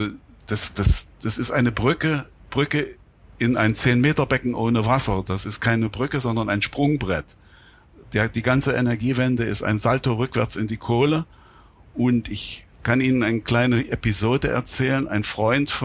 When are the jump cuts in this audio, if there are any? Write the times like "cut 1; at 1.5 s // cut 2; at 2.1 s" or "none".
none